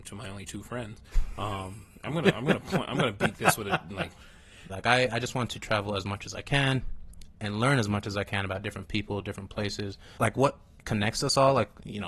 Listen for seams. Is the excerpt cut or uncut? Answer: cut